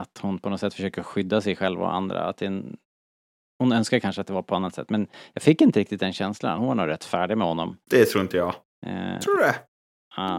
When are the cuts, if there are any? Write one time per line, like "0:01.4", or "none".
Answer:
none